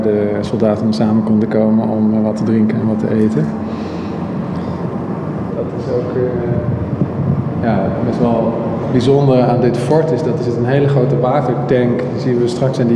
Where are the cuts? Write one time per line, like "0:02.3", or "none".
0:05.5

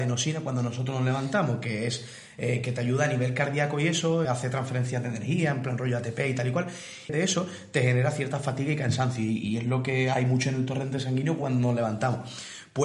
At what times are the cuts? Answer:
0:04.2
0:07.1

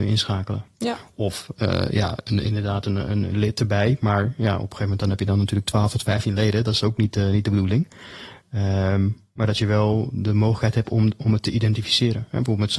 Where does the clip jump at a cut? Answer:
none

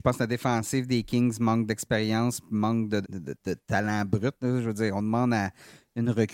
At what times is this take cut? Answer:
0:03.0

